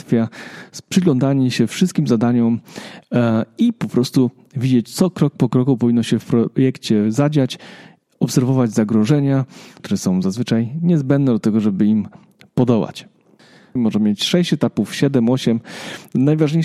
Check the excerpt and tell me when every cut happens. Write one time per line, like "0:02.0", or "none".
0:09.8
0:13.8